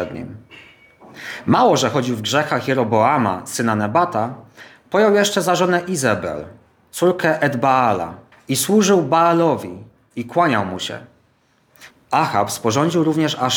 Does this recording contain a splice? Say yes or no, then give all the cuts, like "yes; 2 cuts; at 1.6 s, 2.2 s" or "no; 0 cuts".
yes; 2 cuts; at 8.3 s, 11.9 s